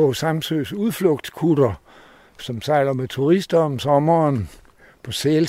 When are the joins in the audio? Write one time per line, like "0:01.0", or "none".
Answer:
0:02.4